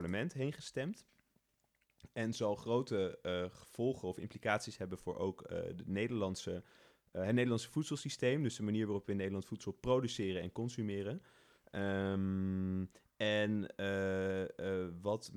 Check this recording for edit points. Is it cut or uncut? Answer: uncut